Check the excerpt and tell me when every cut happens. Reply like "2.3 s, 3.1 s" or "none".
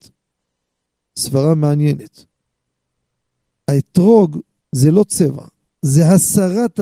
4.6 s